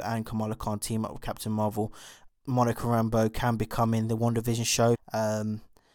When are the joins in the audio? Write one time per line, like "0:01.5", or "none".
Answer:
0:02.3
0:04.9